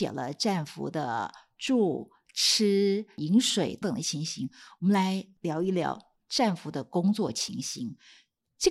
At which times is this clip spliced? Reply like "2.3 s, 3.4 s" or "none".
3.8 s